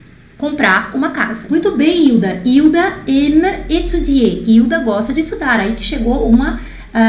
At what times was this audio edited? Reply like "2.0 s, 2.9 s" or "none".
1.5 s